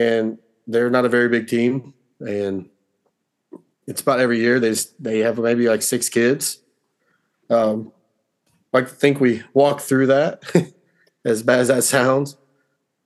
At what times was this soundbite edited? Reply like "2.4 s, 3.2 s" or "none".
none